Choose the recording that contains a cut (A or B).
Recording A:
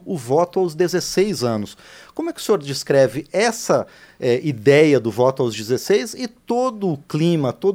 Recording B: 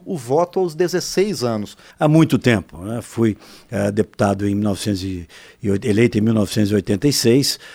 B